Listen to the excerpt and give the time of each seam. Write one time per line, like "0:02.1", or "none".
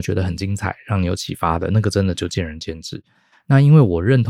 none